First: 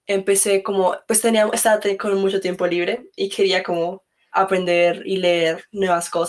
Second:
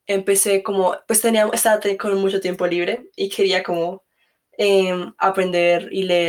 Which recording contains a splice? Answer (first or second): first